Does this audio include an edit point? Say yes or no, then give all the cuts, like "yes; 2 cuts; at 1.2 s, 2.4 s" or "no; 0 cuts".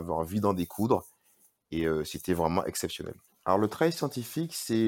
yes; 1 cut; at 3.3 s